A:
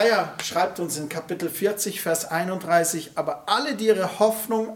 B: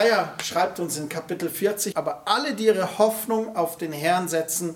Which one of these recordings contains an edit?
B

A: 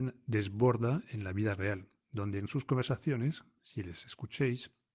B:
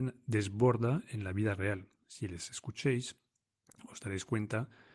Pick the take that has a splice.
B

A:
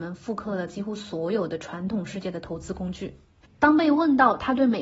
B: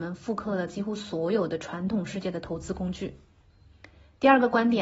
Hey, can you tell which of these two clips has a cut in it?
A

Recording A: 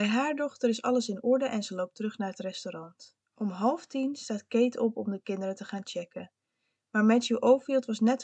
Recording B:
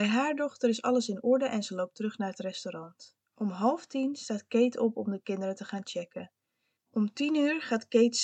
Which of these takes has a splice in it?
B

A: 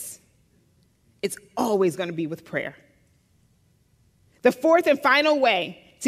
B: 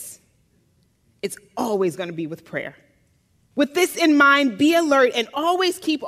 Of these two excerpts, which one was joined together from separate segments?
B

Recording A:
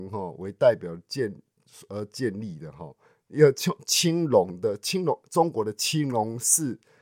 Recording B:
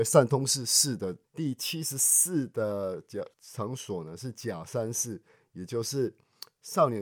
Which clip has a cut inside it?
B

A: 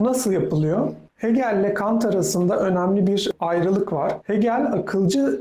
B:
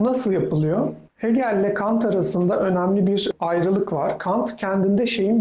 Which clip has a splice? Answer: A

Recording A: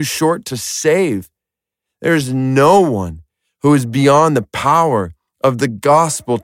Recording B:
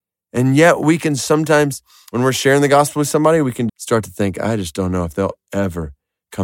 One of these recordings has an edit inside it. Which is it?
B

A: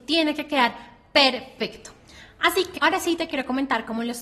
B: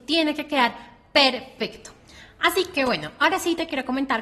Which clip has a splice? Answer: A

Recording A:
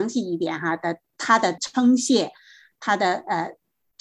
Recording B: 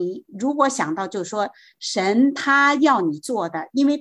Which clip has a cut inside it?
A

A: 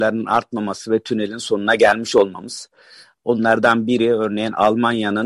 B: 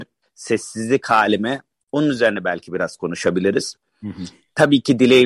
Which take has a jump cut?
A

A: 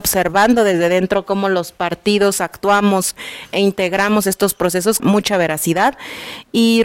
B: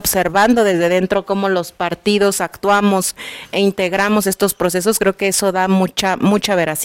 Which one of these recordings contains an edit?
A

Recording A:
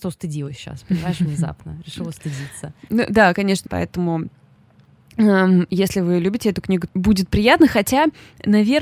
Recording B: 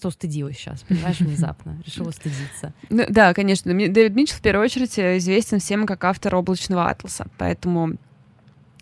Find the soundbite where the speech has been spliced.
A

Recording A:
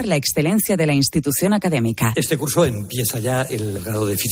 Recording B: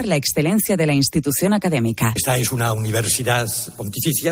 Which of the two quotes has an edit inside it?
A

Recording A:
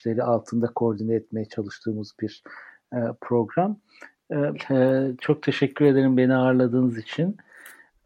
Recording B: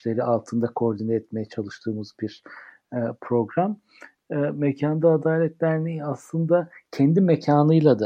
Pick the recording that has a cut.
A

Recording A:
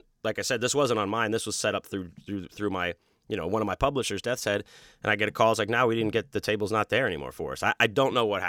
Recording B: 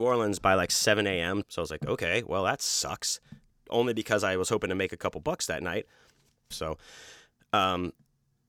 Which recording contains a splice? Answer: B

